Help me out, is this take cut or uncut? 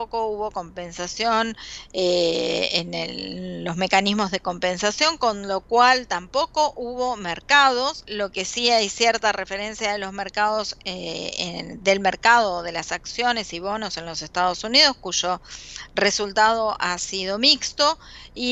cut